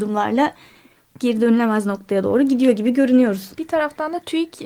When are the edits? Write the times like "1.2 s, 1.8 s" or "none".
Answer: none

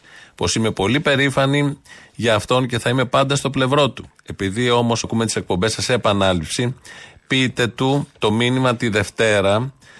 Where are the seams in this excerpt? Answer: 5.0 s

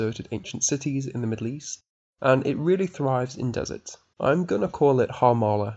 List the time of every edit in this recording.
4.1 s

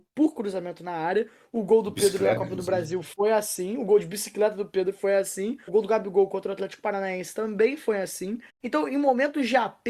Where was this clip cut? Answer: 5.7 s, 8.5 s

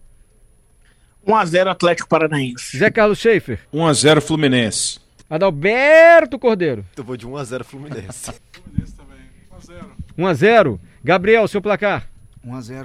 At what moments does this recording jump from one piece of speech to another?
3.7 s, 6.9 s, 8.4 s

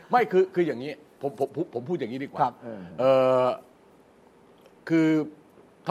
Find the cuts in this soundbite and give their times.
none

